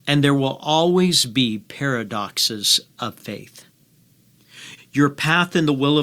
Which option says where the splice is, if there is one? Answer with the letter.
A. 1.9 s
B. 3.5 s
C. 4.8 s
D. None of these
C